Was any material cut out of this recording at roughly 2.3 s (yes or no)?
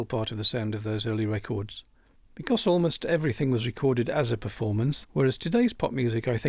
no